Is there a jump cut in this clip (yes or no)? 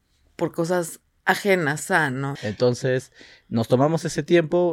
yes